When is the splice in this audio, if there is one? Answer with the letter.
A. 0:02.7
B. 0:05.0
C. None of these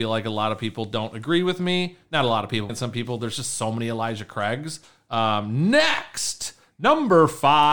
A